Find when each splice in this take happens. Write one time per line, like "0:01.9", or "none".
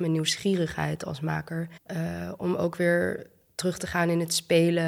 0:01.8